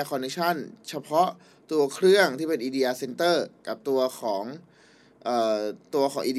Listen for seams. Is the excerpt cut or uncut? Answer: uncut